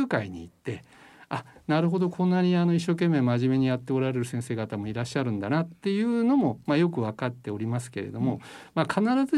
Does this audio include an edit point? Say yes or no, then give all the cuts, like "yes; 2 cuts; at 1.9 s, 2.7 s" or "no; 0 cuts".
no; 0 cuts